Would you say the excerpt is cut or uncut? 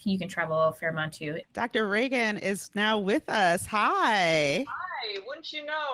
cut